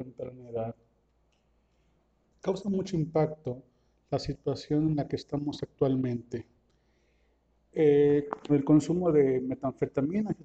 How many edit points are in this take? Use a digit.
2